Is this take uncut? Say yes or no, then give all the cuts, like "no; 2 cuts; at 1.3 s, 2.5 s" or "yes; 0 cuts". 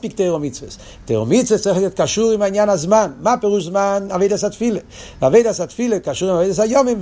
yes; 0 cuts